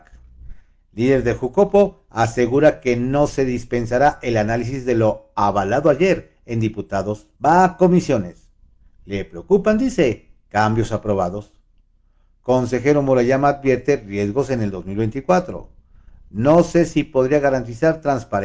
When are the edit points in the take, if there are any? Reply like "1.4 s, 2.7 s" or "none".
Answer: 7.4 s